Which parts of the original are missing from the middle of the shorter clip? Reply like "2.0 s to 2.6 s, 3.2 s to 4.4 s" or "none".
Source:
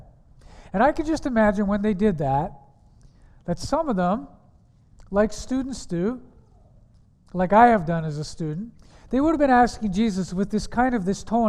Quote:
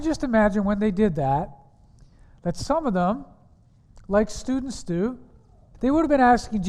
6.8 s to 9.0 s